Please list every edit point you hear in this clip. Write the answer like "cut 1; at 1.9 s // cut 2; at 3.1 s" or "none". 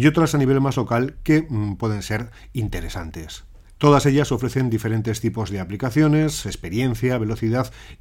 cut 1; at 3.8 s // cut 2; at 6.4 s